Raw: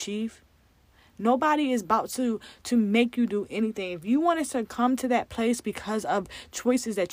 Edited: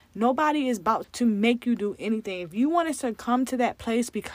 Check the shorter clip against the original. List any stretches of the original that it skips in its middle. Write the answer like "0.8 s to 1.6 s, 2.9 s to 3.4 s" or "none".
2.1 s to 2.5 s